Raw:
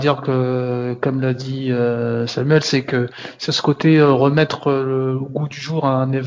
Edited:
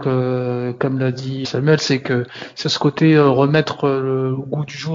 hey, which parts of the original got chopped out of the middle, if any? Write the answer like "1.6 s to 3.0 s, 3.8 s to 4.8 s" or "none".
1.7 s to 2.3 s